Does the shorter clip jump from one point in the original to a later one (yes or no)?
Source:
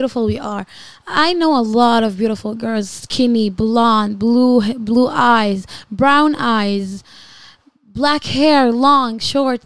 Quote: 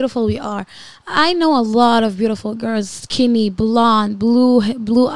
no